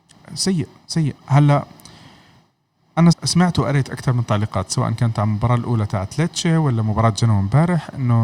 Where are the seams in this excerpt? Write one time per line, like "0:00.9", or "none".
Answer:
0:01.2
0:03.1